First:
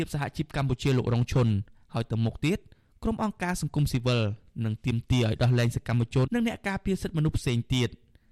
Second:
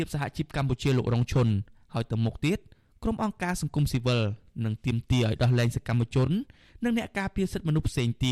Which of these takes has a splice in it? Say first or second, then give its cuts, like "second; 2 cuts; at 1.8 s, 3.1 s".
first; 1 cut; at 6.3 s